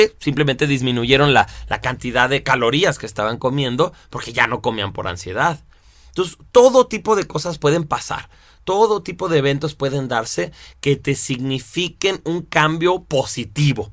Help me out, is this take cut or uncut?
uncut